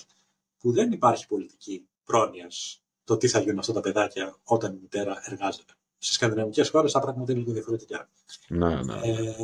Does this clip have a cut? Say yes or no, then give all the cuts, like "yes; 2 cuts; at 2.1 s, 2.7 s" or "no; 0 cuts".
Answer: yes; 1 cut; at 1.9 s